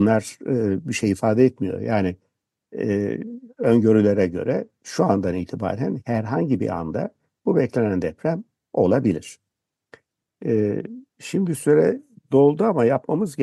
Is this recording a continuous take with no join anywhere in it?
yes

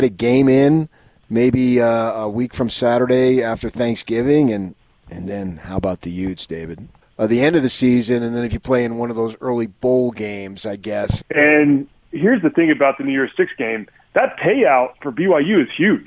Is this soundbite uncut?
no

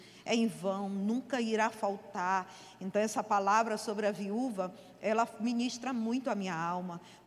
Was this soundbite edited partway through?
no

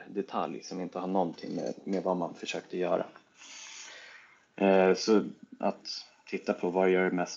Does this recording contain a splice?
no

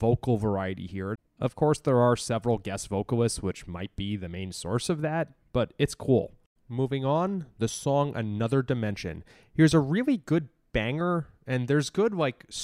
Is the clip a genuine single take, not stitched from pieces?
no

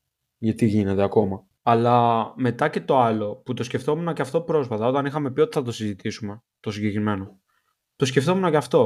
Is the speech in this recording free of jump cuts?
yes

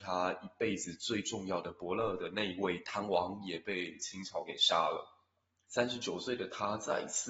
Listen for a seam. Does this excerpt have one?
yes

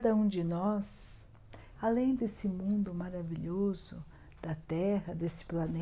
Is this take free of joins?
no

